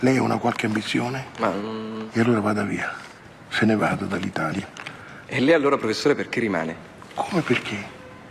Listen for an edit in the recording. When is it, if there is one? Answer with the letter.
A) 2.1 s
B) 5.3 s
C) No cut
B